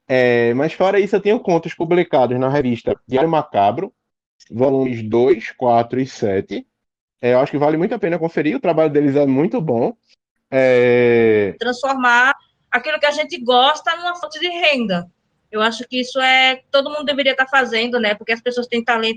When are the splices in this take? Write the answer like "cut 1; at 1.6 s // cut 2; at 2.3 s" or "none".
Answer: cut 1; at 7.1 s // cut 2; at 11.6 s